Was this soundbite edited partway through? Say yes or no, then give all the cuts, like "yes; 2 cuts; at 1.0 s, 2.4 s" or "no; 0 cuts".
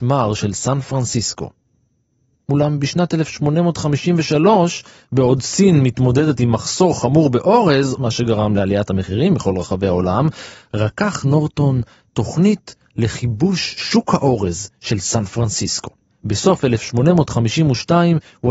yes; 2 cuts; at 8.0 s, 16.0 s